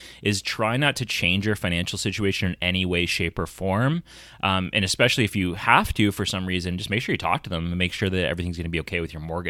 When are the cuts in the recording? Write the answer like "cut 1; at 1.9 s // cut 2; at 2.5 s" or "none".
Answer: none